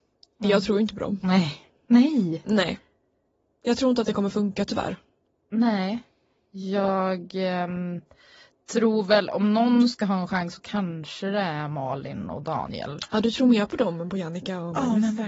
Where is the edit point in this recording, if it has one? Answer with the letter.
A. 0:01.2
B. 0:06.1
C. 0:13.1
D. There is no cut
D